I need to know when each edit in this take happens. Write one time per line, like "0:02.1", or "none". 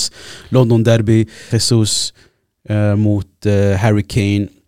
0:01.5

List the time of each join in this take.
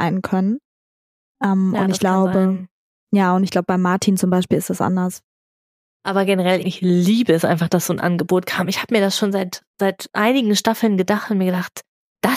0:06.6

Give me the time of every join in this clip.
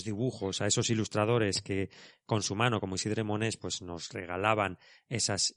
none

